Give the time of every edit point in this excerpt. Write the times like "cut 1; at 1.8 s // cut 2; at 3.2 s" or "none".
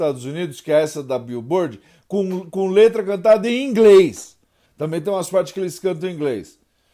cut 1; at 4.7 s